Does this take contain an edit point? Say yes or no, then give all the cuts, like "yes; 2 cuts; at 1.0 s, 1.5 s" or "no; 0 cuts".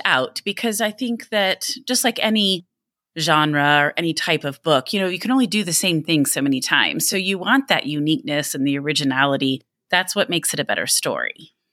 no; 0 cuts